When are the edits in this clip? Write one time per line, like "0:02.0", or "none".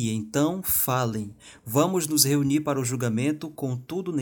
none